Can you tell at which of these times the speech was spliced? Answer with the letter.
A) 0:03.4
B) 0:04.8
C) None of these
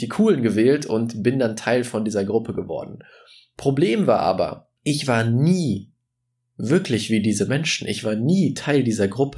B